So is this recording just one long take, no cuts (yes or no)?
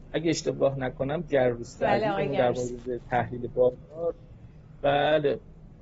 no